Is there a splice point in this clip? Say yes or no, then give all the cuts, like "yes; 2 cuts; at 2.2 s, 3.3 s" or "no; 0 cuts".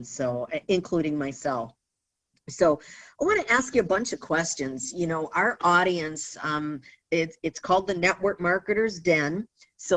no; 0 cuts